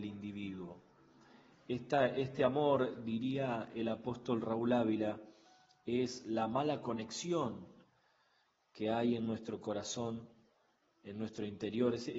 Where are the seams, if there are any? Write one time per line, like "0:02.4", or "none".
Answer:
0:01.5